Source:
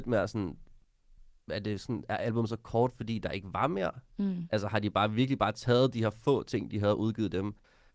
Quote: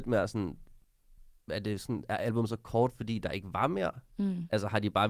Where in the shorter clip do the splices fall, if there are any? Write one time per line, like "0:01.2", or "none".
none